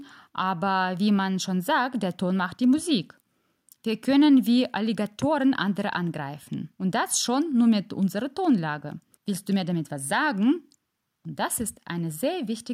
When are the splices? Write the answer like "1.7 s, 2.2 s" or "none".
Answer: 6.7 s, 9.2 s